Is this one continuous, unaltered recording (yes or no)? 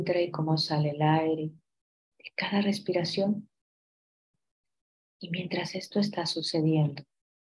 yes